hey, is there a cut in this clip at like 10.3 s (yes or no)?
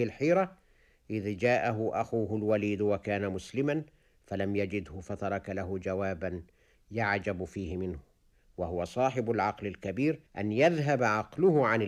yes